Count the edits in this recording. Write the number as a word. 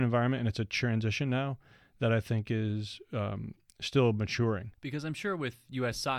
one